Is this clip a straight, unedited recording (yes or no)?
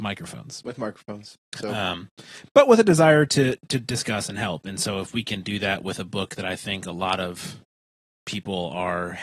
yes